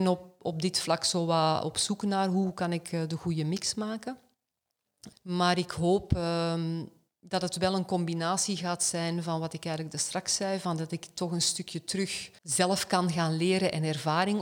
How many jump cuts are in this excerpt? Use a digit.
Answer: 2